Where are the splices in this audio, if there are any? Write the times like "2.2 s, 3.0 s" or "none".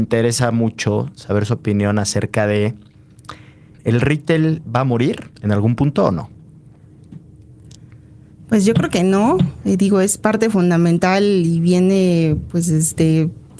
3.7 s, 5.3 s